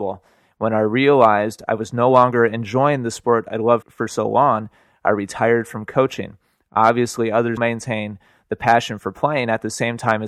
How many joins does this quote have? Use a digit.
2